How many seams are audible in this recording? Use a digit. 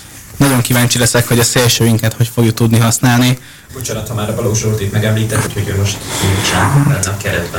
2